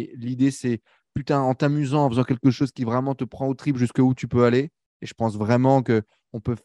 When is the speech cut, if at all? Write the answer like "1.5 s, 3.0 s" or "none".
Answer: none